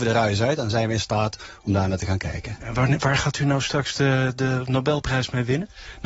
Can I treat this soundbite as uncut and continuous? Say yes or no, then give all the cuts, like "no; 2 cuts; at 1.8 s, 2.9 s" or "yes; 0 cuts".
yes; 0 cuts